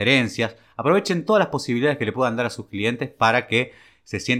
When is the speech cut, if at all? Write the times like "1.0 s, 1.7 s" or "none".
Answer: none